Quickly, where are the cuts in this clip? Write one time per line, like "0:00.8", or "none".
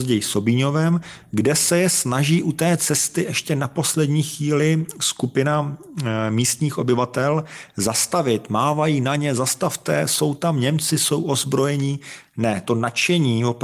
none